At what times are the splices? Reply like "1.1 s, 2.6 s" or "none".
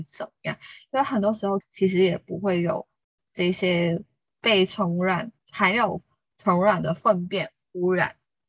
1.6 s, 5.4 s